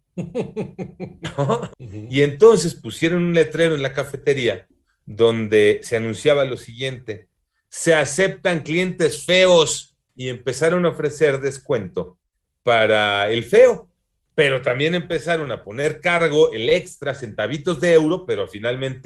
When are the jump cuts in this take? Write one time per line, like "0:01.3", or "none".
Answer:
0:01.7